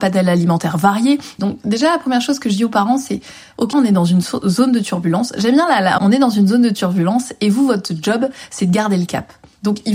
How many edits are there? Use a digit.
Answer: 3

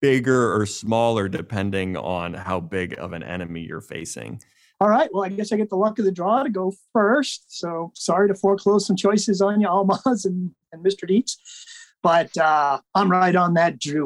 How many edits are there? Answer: 2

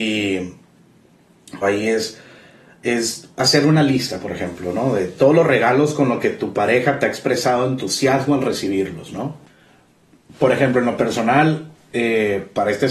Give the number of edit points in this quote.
1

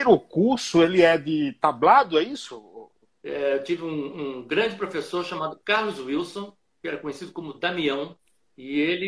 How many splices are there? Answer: 1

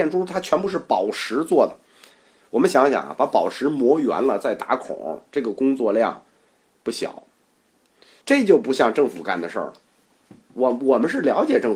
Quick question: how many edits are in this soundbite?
1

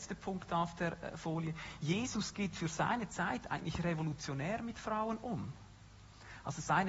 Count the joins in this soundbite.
0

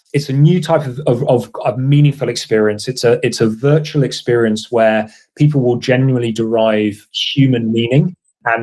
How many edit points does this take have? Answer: 0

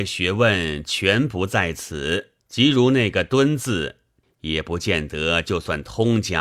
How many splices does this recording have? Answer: 2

